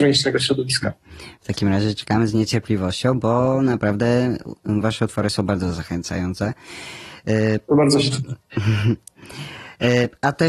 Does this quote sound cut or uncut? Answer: uncut